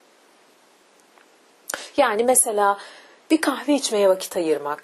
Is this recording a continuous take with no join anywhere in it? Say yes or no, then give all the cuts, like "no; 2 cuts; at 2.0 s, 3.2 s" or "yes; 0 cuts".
yes; 0 cuts